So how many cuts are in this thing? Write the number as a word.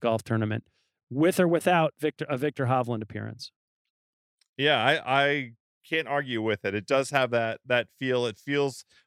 zero